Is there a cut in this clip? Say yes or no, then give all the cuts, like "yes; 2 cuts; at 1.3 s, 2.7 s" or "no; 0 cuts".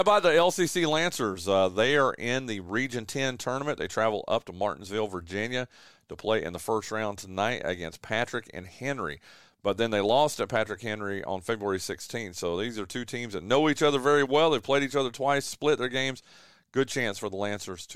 yes; 1 cut; at 9.4 s